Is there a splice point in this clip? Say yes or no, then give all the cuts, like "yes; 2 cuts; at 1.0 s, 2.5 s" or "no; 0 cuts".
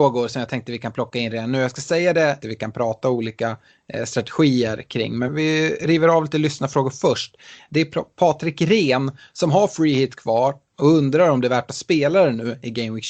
yes; 2 cuts; at 2.4 s, 5.3 s